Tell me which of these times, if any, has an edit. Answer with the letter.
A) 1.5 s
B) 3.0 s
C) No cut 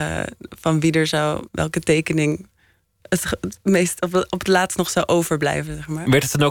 A